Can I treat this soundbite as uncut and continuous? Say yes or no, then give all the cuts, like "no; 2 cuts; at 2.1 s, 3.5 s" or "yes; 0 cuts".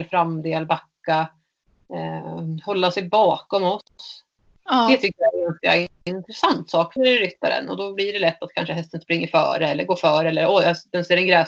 no; 1 cut; at 7.0 s